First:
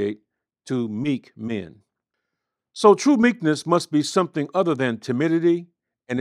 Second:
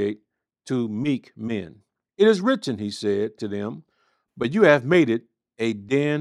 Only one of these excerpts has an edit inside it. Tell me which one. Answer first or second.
second